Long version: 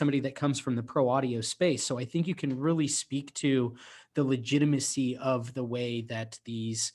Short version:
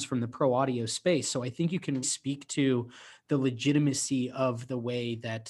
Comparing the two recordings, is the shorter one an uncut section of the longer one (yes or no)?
no